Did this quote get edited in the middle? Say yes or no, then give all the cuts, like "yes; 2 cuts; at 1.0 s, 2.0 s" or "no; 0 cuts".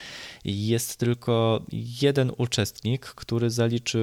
no; 0 cuts